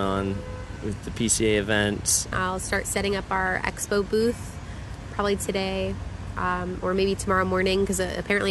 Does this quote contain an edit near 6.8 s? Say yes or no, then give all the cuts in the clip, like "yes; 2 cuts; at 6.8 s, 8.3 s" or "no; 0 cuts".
no; 2 cuts; at 2.3 s, 5.1 s